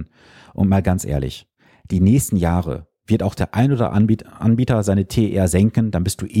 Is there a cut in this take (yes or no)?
no